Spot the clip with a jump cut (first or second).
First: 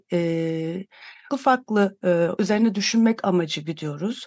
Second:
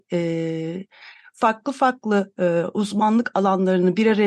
first